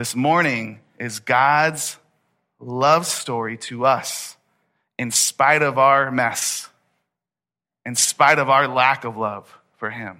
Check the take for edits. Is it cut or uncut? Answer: uncut